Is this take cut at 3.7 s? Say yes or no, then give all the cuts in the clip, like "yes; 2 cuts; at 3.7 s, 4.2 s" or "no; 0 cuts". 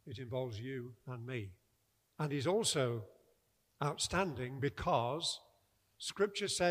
no; 1 cut; at 2.1 s